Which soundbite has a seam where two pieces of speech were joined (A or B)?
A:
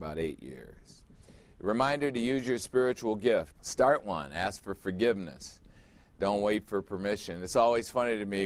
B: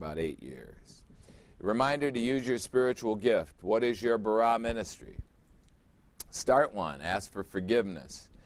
A